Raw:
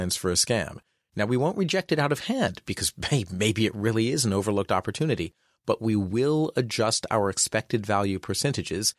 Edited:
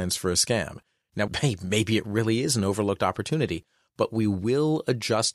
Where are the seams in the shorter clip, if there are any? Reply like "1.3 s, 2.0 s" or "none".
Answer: 1.3 s